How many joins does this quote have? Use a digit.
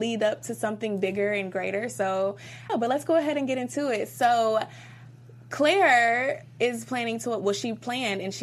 1